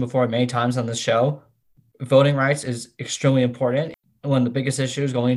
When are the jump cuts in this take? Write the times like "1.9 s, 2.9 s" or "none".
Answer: none